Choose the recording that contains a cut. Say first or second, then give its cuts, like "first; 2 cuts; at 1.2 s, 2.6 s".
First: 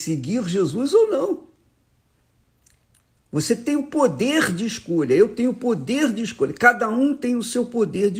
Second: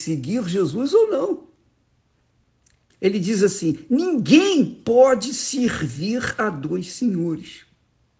second; 1 cut; at 2.9 s